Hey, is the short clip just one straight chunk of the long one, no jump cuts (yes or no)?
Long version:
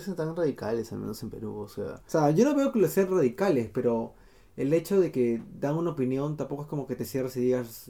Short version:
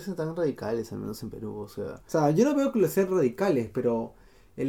yes